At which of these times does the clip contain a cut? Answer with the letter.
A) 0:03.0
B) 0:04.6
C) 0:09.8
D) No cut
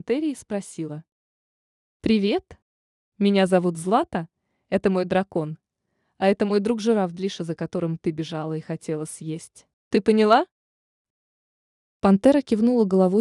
C